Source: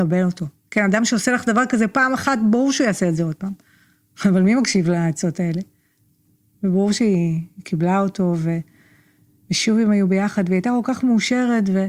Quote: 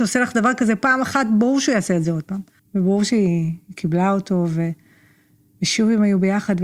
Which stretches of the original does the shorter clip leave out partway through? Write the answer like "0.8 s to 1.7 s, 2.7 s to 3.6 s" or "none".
3.7 s to 6.5 s